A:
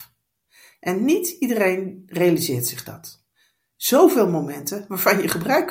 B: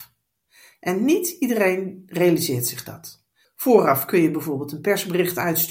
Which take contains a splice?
B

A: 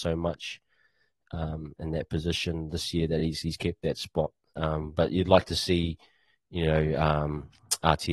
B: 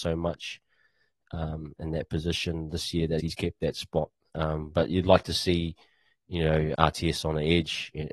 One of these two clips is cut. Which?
B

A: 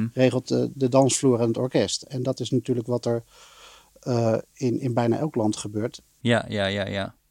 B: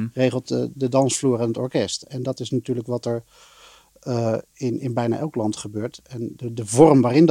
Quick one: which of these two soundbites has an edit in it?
A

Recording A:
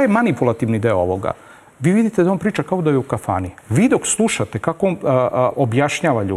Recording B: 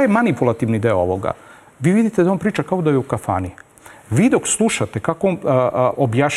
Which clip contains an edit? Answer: A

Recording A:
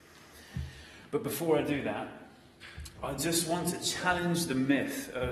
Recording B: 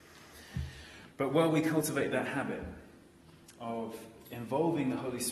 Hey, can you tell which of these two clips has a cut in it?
B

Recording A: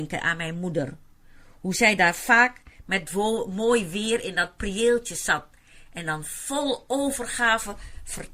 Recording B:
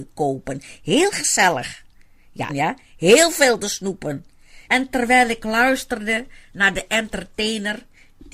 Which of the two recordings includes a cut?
B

